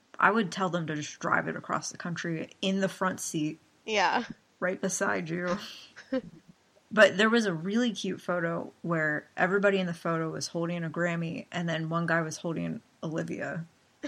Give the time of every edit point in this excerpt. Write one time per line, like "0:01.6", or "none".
none